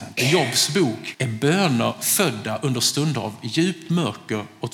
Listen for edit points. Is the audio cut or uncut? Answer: cut